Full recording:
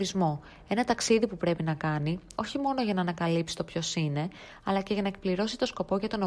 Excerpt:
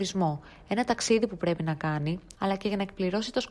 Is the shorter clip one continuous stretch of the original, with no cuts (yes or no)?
no